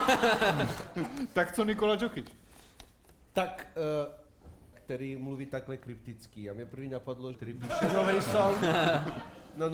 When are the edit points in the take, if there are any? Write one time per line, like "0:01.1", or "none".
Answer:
0:04.7
0:07.3